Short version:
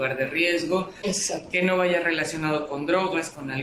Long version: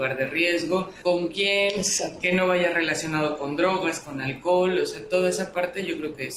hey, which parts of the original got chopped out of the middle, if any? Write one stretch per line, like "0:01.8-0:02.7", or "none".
0:01.0-0:01.7